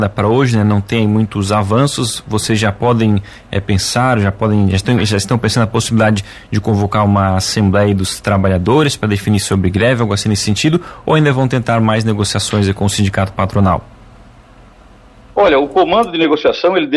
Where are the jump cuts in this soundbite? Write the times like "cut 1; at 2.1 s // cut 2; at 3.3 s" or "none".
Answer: none